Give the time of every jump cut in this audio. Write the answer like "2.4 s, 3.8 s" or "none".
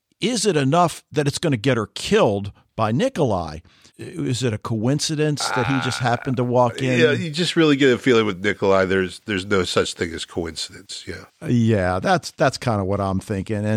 3.9 s